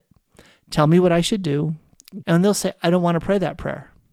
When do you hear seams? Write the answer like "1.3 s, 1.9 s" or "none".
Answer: 2.2 s